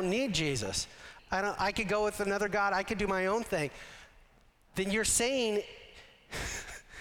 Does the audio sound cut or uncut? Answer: cut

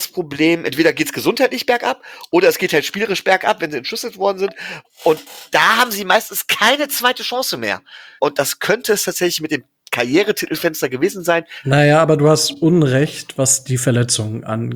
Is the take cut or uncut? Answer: cut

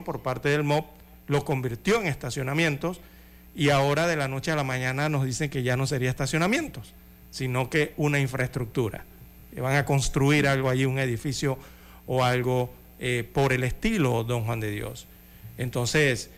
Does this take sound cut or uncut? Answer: uncut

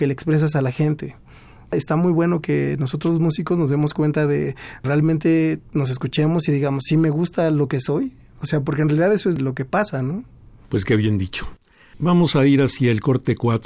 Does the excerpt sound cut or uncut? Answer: uncut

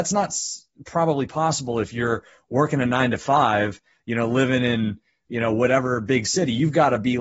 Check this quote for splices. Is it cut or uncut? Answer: uncut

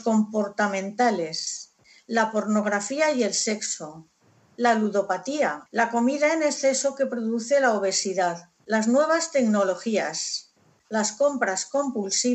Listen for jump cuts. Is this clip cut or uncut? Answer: cut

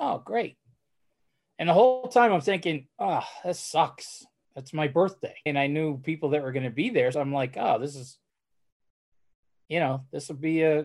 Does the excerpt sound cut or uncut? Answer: cut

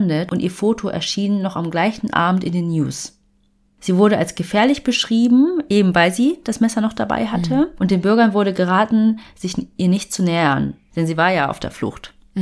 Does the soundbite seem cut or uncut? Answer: uncut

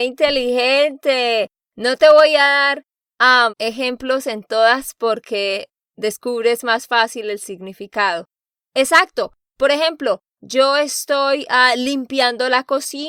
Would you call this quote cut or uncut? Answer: cut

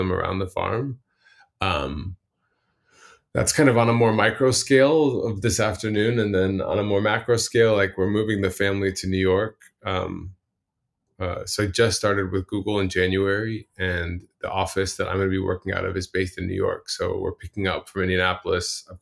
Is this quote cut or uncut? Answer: uncut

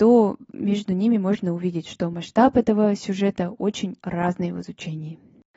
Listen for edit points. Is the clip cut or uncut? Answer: cut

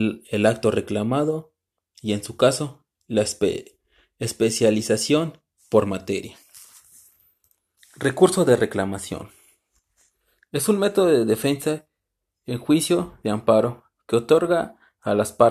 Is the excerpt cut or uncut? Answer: uncut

